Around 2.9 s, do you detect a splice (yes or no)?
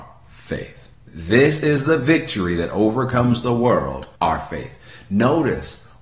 no